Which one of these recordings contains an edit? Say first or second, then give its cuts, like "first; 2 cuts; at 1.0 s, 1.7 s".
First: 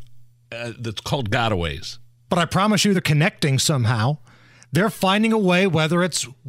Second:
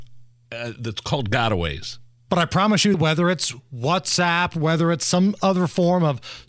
second; 1 cut; at 2.9 s